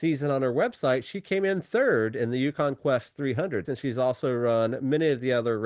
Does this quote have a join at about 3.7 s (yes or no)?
yes